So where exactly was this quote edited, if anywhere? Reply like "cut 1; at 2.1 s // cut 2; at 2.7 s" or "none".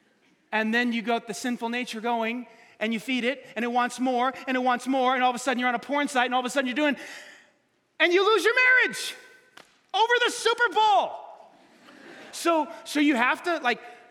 cut 1; at 12.3 s